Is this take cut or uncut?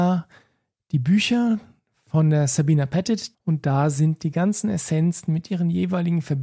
cut